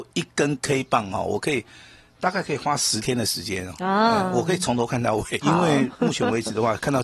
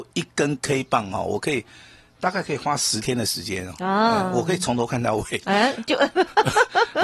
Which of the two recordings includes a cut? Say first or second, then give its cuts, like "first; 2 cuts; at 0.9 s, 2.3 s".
first; 1 cut; at 5.4 s